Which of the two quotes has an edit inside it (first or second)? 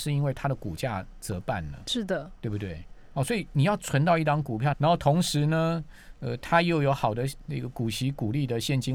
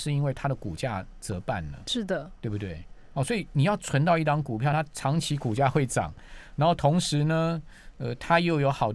first